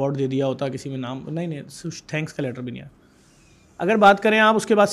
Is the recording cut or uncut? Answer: uncut